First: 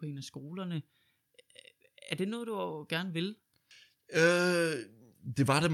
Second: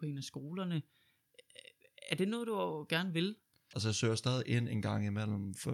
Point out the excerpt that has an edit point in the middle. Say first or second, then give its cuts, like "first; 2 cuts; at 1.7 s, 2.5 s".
second; 1 cut; at 3.7 s